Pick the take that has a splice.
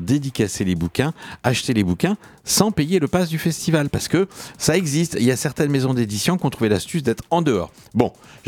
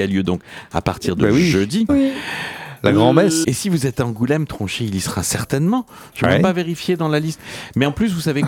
second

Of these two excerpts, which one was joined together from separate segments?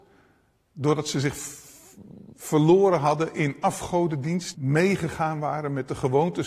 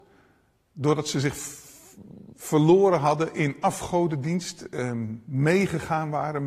first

